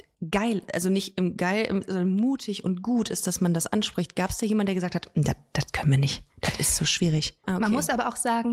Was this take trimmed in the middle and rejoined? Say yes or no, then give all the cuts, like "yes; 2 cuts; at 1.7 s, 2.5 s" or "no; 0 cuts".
yes; 1 cut; at 7.4 s